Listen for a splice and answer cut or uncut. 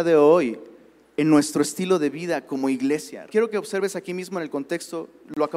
cut